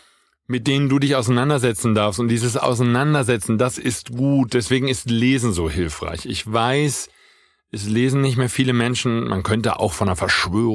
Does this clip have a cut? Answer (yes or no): no